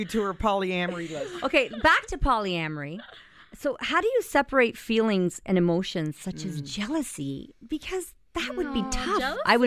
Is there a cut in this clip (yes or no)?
no